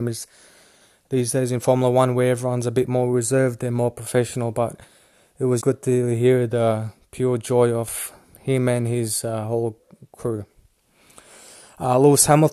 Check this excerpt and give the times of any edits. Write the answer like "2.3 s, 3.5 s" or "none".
5.6 s